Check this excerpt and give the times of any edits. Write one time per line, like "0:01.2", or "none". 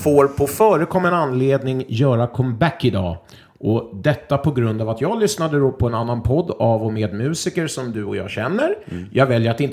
none